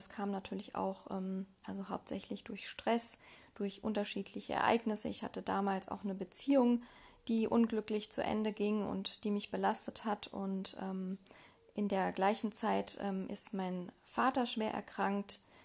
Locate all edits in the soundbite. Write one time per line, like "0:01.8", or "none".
none